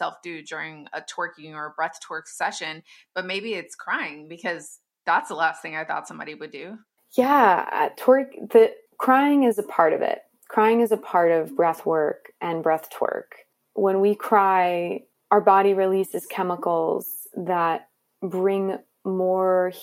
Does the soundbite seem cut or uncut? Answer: cut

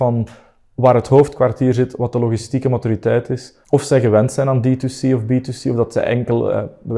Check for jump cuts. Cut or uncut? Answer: uncut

